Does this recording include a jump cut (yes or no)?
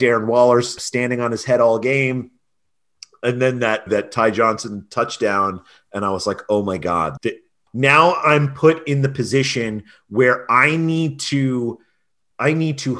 yes